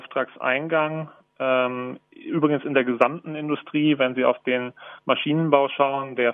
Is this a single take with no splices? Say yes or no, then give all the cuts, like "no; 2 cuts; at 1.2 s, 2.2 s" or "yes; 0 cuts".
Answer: yes; 0 cuts